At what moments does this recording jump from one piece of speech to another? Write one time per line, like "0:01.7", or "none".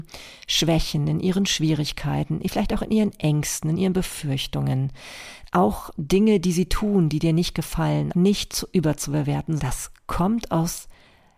0:08.1
0:09.6